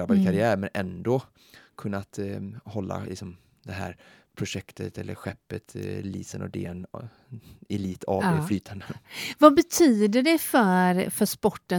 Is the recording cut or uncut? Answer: uncut